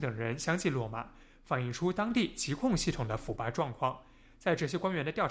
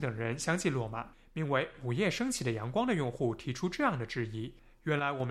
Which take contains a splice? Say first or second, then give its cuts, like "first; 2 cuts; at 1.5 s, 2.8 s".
second; 1 cut; at 1.1 s